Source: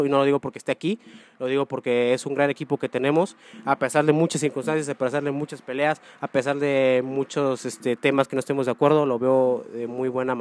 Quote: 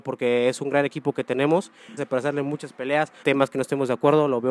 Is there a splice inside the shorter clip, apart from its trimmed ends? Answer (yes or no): yes